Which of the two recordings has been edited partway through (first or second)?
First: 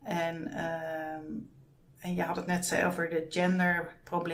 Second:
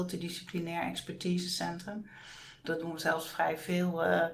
second